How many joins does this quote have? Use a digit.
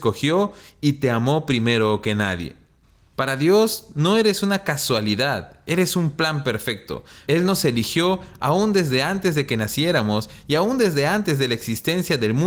2